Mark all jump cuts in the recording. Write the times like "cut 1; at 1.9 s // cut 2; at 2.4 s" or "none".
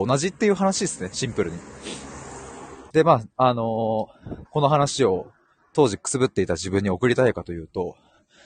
cut 1; at 2.9 s // cut 2; at 4.4 s